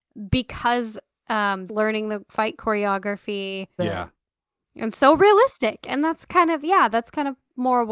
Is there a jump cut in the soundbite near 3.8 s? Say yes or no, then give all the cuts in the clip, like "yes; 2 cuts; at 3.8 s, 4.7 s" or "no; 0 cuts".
yes; 2 cuts; at 1.7 s, 3.8 s